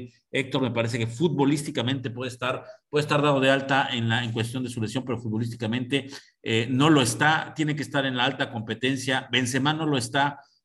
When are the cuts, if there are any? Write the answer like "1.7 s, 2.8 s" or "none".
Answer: none